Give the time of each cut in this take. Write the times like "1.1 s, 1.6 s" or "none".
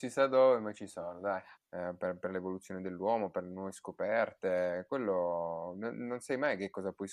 1.6 s